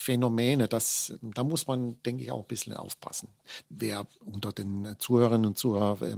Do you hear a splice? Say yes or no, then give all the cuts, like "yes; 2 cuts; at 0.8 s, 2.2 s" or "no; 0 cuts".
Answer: yes; 1 cut; at 3.6 s